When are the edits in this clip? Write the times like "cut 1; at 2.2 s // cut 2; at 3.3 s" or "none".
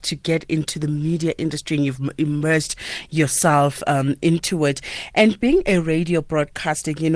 none